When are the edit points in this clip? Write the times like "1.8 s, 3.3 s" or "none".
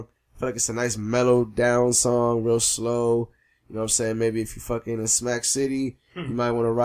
none